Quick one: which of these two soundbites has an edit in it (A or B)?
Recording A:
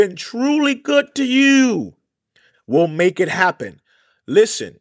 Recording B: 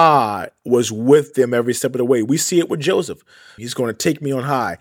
B